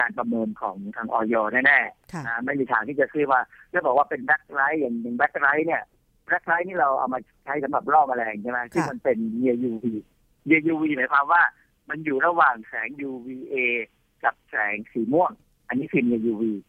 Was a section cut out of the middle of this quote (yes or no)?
no